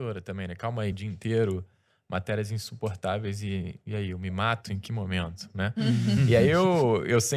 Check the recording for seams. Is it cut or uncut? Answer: cut